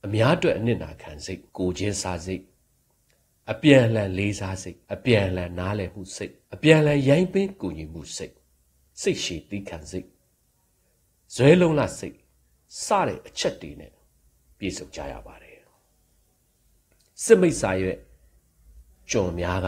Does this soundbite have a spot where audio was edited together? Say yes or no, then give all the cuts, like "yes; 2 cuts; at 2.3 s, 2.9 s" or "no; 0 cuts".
yes; 3 cuts; at 1.5 s, 4.8 s, 6.4 s